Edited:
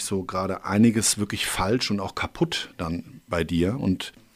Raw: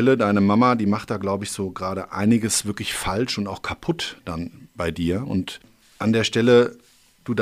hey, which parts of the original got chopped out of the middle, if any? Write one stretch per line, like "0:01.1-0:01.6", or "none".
none